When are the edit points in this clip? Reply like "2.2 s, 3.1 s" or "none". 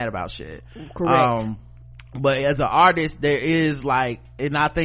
none